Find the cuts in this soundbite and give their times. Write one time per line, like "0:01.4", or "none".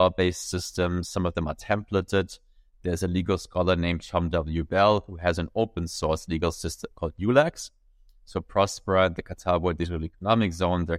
none